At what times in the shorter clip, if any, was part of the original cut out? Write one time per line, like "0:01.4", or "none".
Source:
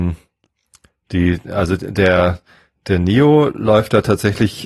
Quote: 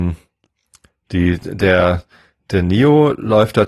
0:01.4